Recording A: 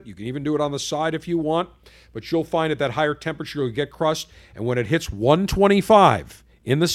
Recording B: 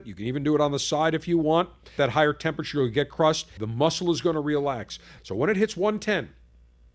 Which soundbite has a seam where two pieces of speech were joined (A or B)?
B